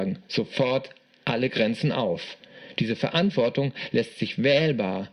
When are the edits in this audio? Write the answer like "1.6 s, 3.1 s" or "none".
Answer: none